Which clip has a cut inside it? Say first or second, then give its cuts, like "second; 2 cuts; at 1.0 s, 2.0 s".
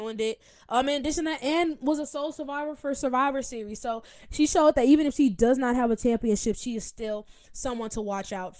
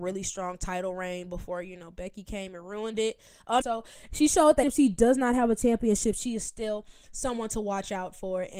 second; 2 cuts; at 3.6 s, 4.6 s